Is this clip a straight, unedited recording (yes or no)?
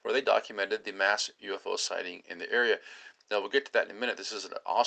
yes